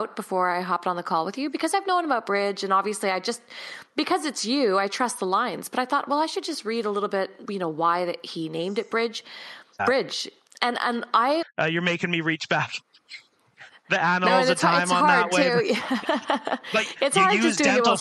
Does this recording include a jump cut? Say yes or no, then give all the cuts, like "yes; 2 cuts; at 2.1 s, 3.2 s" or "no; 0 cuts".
yes; 3 cuts; at 7.5 s, 9.8 s, 11.4 s